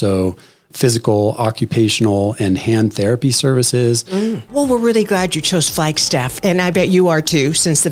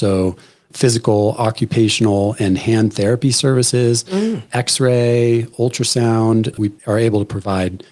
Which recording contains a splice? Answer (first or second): first